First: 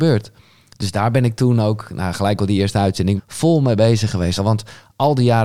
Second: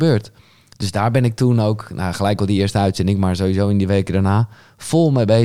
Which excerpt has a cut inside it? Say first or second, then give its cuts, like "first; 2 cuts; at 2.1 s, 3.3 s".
first; 2 cuts; at 3.2 s, 4.4 s